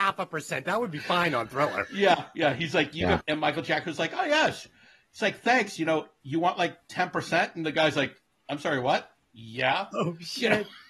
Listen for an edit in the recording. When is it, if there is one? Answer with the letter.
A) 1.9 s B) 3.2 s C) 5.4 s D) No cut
B